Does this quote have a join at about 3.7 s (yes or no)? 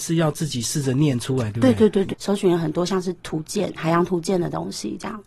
no